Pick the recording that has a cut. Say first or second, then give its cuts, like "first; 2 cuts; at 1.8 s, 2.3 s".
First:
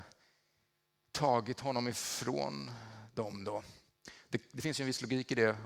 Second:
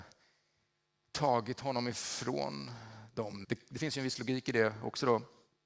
second; 1 cut; at 3.4 s